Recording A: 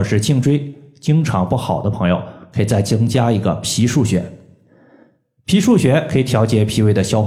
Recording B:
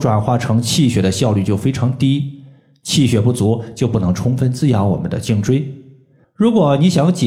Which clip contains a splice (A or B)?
B